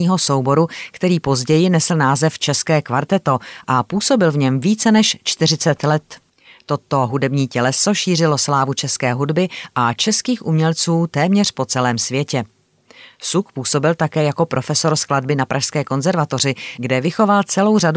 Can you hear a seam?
no; 0 cuts

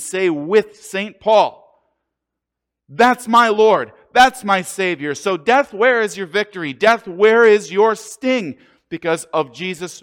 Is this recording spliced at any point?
no; 0 cuts

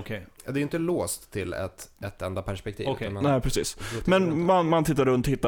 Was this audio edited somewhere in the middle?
no; 0 cuts

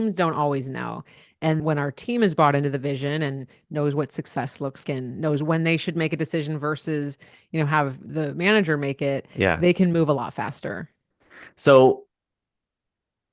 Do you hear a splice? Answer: yes; 2 cuts; at 1.6 s, 4.8 s

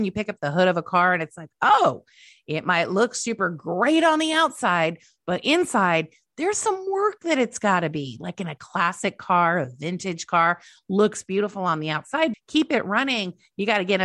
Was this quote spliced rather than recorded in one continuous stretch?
yes; 1 cut; at 12.3 s

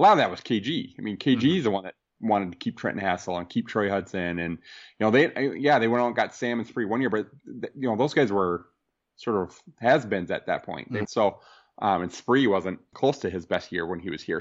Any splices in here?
yes; 2 cuts; at 11.1 s, 12.9 s

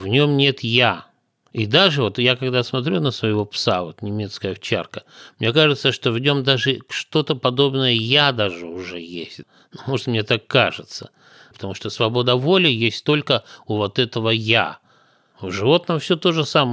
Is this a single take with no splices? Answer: no; 2 cuts; at 11.5 s, 15.3 s

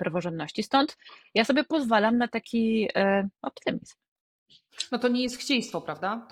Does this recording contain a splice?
no; 0 cuts

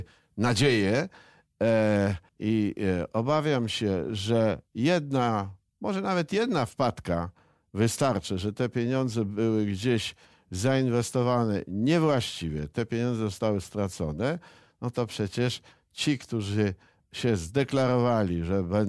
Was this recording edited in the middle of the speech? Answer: yes; 1 cut; at 2.3 s

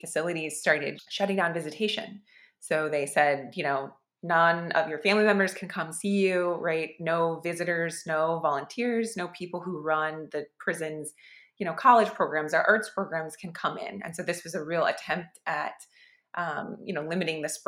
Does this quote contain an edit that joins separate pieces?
no; 0 cuts

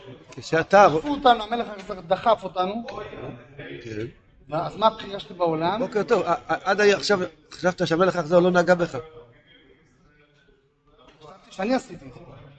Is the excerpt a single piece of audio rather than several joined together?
yes; 0 cuts

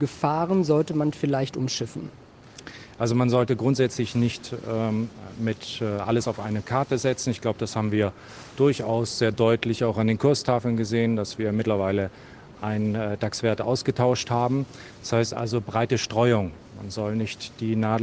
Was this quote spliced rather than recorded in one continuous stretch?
no; 0 cuts

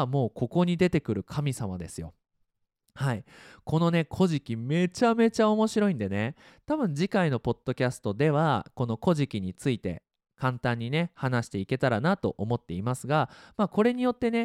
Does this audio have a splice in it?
no; 0 cuts

